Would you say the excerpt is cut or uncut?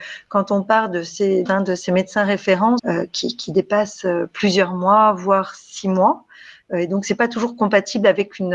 cut